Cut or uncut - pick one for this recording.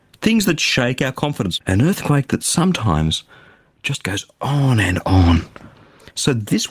cut